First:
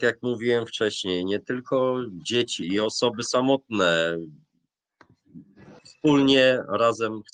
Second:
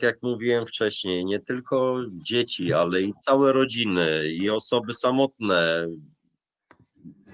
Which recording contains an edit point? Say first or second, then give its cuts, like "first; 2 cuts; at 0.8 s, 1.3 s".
first; 2 cuts; at 2.6 s, 5.8 s